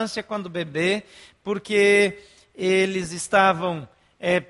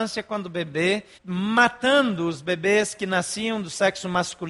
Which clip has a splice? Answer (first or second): second